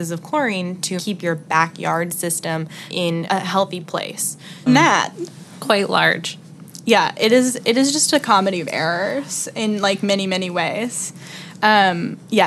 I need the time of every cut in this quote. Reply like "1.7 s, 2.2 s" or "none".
4.7 s